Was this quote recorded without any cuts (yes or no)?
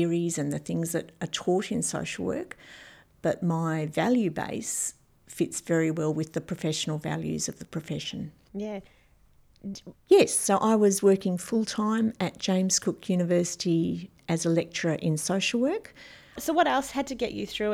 no